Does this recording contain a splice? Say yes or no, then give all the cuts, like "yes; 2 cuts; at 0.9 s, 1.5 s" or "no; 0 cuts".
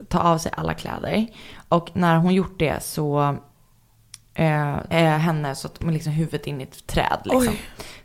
yes; 1 cut; at 4.9 s